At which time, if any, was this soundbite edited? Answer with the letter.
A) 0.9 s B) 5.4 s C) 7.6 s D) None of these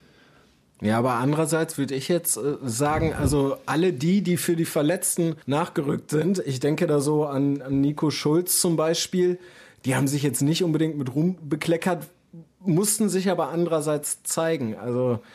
B